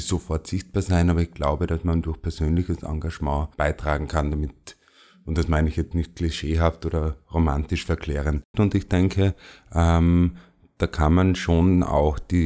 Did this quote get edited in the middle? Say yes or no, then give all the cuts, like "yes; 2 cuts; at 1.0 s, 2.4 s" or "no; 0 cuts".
yes; 2 cuts; at 3.5 s, 8.5 s